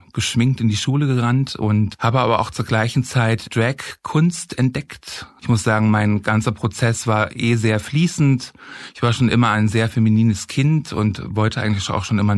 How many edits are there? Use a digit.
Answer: 1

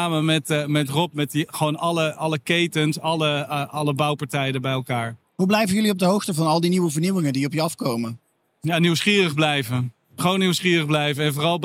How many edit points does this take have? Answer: 0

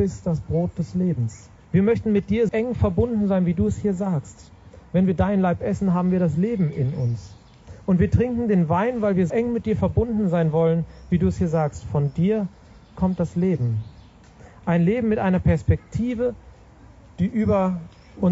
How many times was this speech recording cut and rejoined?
2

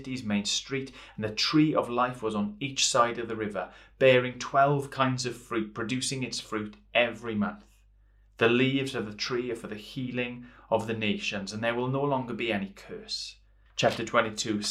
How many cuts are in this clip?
1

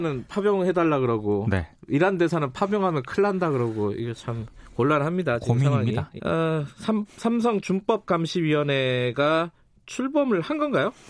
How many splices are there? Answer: 1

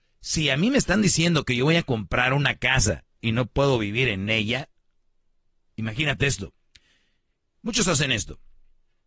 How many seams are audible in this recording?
0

